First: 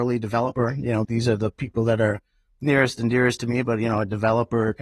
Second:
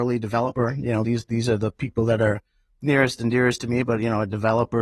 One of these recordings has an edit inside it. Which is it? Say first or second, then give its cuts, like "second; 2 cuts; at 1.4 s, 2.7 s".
first; 1 cut; at 1.0 s